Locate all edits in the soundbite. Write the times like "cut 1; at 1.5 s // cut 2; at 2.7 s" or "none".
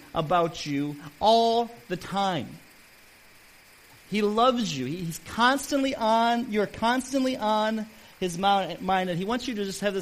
none